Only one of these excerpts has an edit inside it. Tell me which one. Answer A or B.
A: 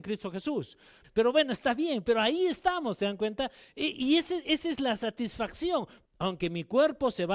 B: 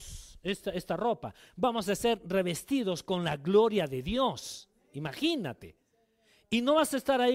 A